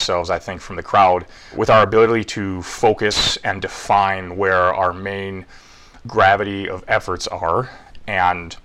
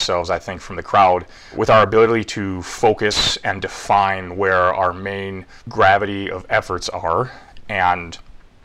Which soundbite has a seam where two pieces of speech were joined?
second; 1 cut; at 5.6 s

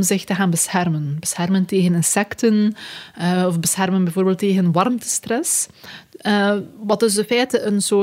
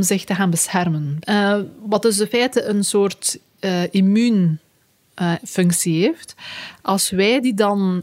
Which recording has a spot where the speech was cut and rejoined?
second; 1 cut; at 1.2 s

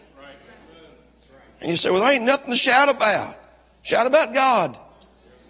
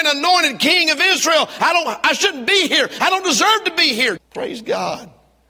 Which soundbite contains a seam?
second; 1 cut; at 4.2 s

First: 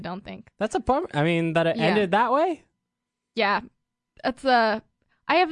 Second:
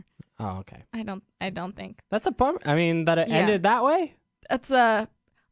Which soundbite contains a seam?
second; 1 cut; at 4.3 s

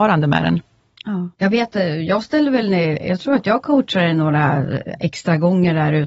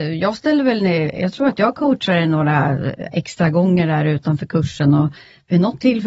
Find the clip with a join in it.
first; 1 cut; at 1.3 s

